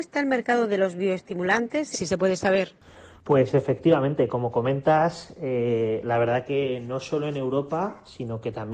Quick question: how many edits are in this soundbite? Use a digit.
1